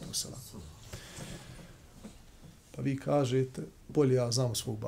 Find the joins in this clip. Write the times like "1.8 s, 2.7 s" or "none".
2.6 s, 3.8 s